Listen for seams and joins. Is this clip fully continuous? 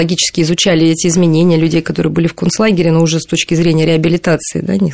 yes; 0 cuts

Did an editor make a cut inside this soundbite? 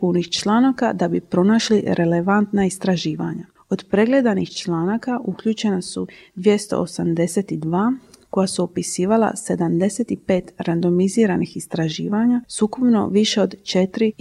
no; 0 cuts

